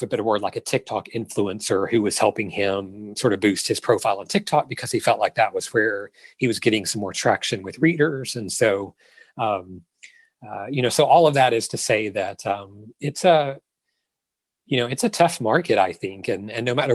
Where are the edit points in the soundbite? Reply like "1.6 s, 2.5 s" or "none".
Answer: none